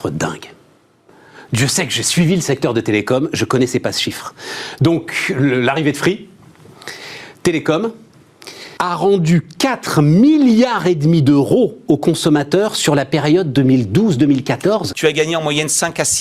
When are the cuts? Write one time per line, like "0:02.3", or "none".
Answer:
0:08.8
0:14.9

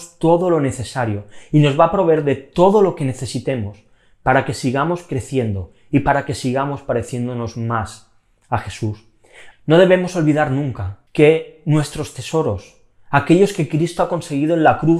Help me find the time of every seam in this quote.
0:09.5
0:11.1

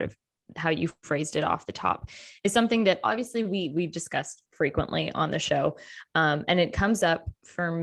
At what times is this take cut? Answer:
none

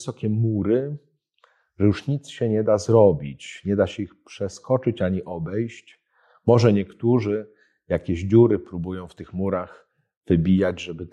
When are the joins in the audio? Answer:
none

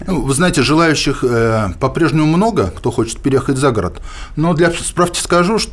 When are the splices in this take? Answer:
none

